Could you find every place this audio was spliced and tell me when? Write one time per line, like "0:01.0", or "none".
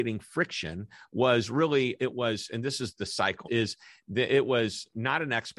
0:02.0
0:03.4